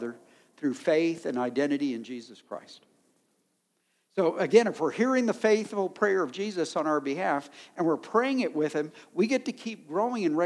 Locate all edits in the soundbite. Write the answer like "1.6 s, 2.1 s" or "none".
none